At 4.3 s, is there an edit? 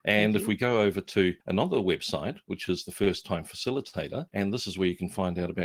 yes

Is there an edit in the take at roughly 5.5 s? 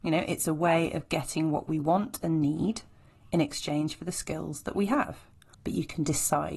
yes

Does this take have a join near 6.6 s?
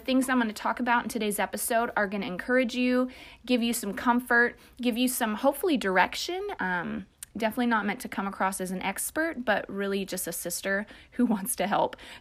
yes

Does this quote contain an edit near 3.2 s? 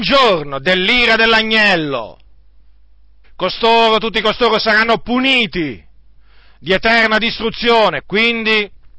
yes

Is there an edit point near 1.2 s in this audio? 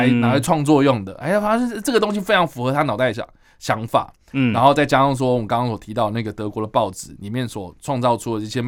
no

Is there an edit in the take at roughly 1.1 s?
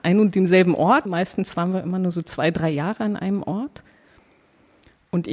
yes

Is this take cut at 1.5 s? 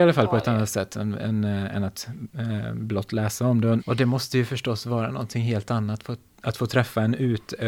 no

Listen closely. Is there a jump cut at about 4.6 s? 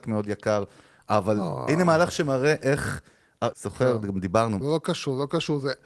yes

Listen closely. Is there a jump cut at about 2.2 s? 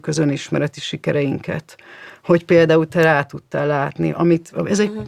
no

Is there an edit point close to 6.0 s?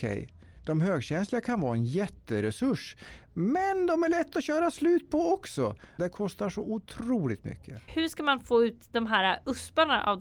yes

